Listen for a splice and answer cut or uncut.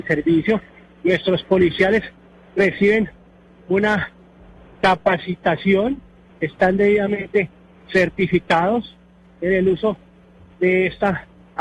cut